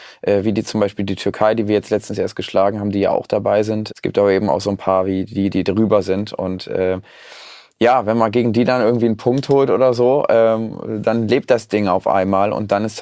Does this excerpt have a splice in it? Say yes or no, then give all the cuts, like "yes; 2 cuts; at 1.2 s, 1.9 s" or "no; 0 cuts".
yes; 2 cuts; at 3.9 s, 5.5 s